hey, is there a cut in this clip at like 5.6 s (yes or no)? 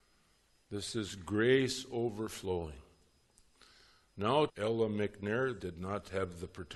yes